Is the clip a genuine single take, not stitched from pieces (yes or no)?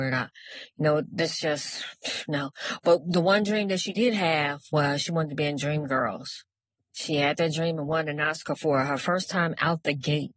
yes